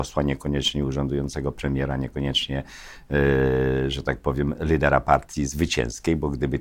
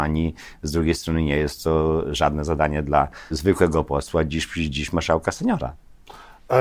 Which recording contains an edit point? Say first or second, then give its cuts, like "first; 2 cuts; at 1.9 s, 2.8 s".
second; 1 cut; at 3.3 s